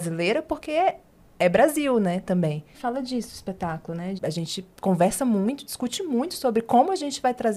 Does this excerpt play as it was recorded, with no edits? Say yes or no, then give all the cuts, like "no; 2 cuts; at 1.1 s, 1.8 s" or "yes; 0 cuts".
no; 2 cuts; at 2.7 s, 4.2 s